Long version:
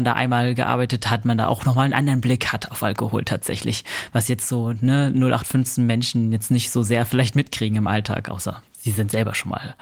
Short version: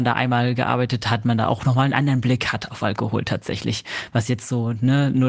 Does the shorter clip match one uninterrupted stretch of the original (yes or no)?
yes